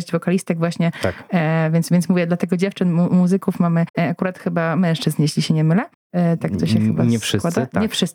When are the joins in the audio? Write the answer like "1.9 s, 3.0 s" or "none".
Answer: none